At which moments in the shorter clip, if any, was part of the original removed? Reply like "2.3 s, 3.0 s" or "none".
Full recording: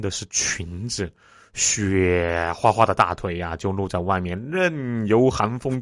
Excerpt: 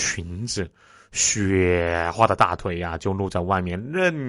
2.1 s